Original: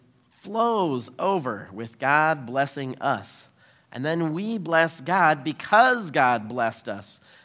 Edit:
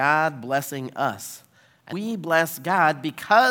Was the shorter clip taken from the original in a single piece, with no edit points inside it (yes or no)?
no